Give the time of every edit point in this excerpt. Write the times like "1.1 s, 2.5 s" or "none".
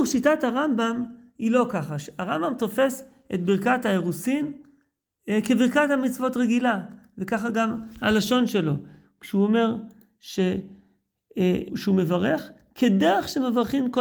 11.7 s